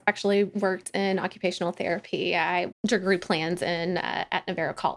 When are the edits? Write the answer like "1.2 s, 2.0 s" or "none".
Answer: 2.7 s